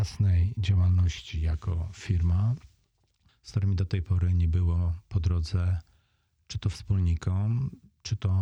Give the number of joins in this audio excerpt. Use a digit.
1